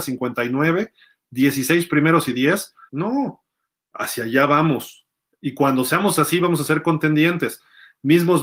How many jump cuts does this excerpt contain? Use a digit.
1